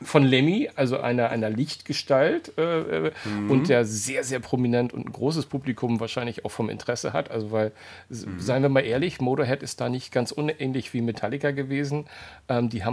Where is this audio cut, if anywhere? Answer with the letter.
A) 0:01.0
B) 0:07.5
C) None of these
C